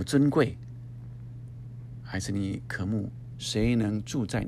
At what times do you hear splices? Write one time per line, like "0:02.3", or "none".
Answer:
0:03.3